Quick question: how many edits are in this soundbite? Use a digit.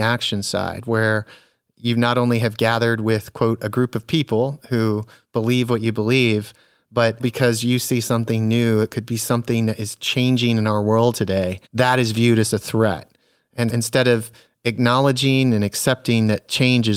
3